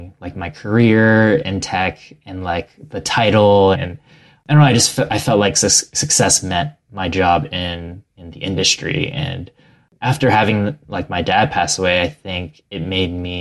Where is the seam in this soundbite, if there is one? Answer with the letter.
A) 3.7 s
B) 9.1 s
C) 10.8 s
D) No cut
A